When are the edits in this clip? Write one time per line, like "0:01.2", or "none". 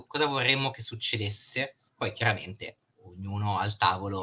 0:01.9

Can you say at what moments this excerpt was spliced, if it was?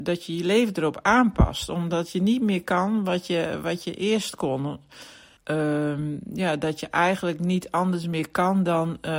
0:05.4

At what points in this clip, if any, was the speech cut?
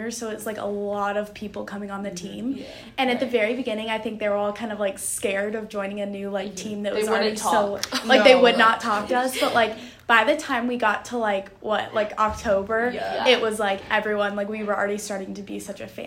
none

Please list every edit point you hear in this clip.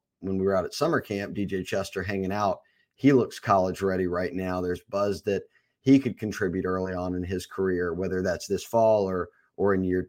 none

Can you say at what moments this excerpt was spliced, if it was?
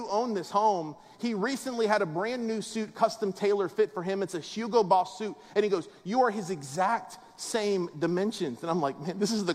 none

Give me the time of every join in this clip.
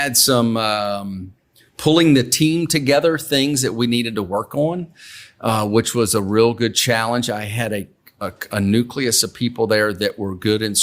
none

